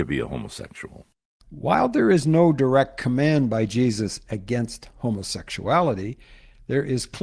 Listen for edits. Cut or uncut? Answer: uncut